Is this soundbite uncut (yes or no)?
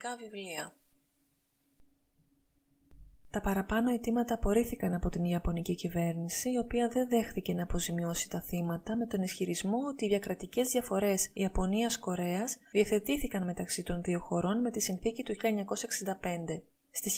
yes